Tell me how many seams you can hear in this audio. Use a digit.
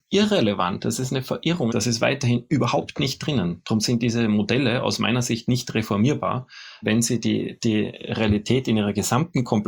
2